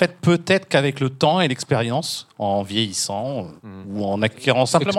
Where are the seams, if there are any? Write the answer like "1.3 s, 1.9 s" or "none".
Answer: 3.6 s

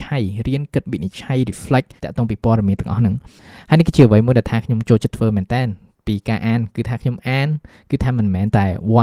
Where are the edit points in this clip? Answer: 2.0 s

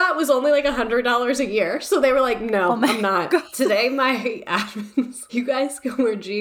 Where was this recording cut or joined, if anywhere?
3.5 s, 5.3 s

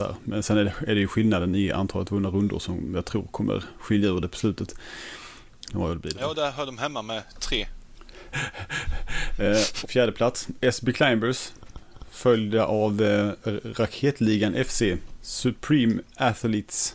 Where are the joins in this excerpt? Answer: 5.7 s, 9.8 s

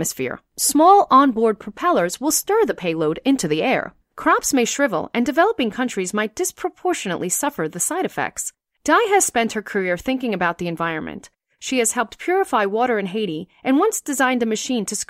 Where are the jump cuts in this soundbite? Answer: 4.0 s

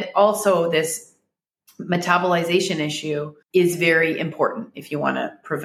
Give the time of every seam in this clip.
3.4 s

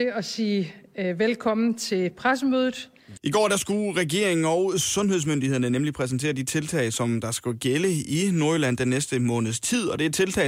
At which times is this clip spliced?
3.2 s

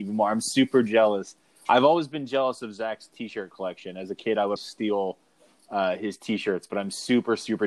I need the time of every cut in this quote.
4.6 s

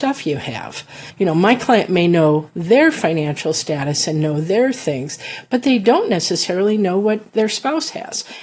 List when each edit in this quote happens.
none

